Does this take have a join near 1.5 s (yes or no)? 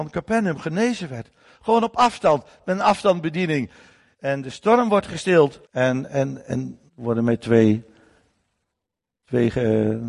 no